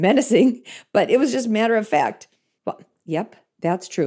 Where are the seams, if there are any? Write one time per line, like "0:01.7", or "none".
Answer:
0:02.6